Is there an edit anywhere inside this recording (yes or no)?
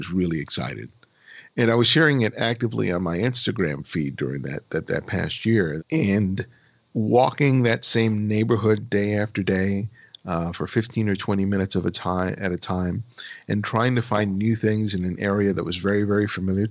yes